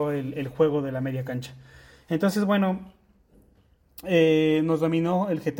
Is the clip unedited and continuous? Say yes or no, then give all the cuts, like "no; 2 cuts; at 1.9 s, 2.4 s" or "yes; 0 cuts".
yes; 0 cuts